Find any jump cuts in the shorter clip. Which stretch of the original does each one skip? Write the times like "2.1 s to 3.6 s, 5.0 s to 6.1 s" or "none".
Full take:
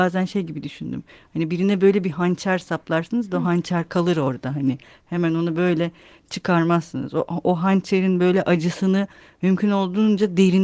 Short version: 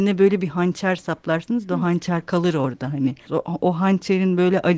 4.9 s to 7.1 s